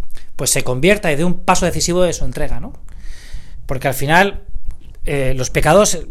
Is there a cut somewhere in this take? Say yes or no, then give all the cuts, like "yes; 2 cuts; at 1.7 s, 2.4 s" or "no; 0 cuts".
no; 0 cuts